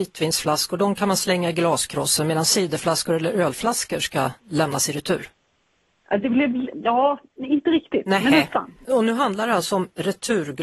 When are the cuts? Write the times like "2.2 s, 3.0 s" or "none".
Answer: 4.4 s, 8.8 s